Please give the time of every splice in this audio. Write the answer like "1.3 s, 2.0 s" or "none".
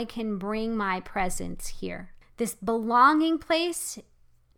2.2 s